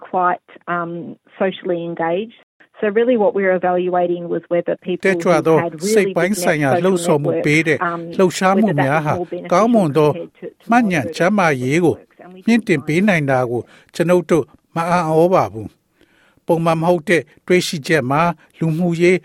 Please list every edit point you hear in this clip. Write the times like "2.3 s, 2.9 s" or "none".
none